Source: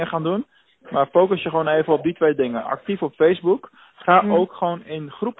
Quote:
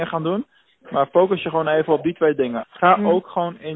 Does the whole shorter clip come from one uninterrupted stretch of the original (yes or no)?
no